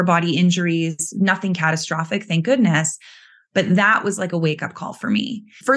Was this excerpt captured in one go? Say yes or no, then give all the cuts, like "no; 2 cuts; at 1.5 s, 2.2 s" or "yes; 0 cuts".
yes; 0 cuts